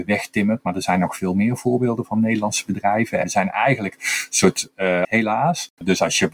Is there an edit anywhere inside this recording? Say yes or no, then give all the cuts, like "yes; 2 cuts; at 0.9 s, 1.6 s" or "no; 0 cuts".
yes; 2 cuts; at 3.2 s, 5.0 s